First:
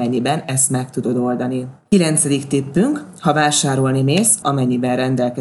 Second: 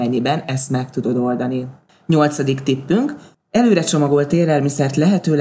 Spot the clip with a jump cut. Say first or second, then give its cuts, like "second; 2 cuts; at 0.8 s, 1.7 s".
first; 2 cuts; at 1.9 s, 4.4 s